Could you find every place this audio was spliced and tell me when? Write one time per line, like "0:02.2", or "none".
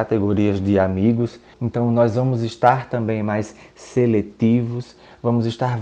0:01.5